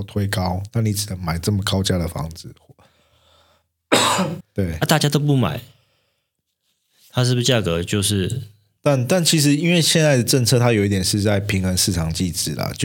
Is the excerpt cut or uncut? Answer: cut